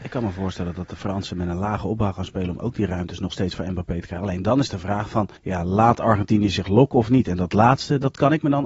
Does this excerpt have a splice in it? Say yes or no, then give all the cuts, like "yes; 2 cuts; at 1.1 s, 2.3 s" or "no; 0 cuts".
yes; 1 cut; at 5.4 s